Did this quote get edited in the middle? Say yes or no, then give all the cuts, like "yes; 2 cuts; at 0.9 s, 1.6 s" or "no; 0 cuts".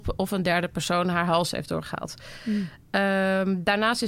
no; 0 cuts